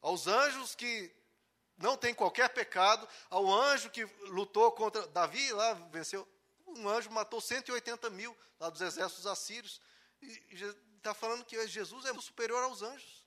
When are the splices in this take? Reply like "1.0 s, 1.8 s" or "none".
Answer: 5.9 s, 12.1 s